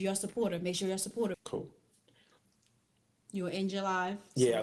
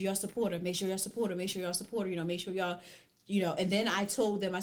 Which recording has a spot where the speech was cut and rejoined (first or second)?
first